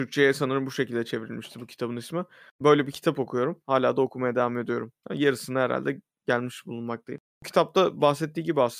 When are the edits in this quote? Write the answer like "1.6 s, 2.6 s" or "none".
3.6 s